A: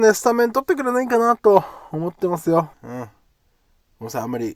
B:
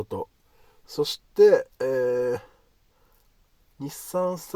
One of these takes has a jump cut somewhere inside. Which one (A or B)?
A